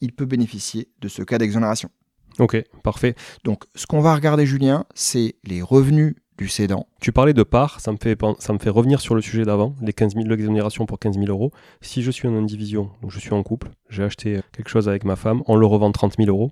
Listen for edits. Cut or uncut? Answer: cut